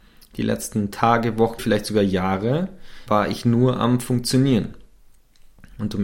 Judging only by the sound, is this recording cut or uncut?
cut